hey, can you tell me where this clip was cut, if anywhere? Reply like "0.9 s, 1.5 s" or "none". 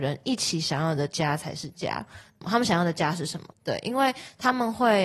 2.4 s, 3.5 s